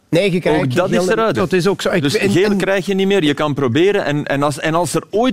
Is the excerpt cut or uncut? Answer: cut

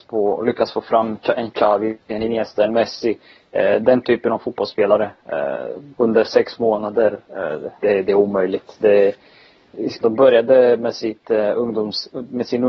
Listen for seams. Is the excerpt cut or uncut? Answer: cut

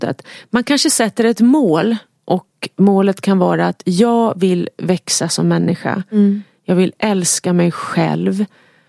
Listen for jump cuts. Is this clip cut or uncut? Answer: uncut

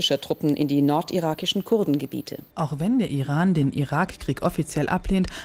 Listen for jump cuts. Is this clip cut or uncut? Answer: cut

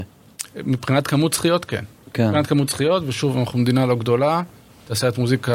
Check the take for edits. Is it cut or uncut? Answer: uncut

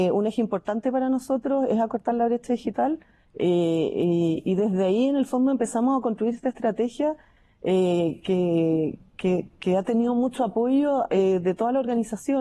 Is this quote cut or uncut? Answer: cut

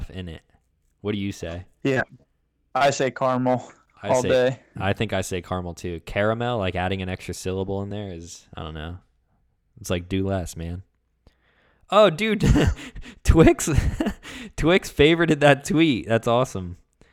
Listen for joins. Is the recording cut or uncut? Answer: uncut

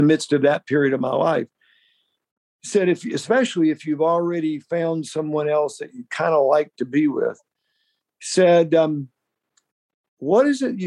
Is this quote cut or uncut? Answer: uncut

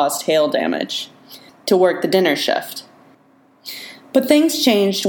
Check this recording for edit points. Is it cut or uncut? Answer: cut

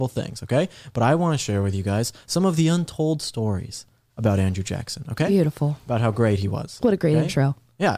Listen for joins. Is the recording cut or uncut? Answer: uncut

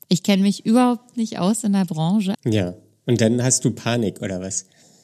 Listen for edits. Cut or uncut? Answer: cut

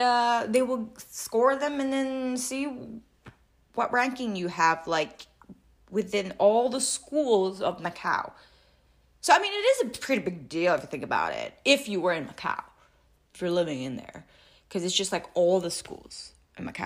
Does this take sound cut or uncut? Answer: uncut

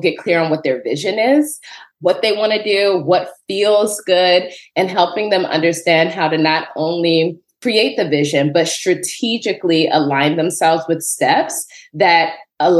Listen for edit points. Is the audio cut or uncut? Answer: uncut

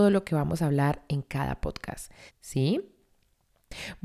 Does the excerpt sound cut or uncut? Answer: cut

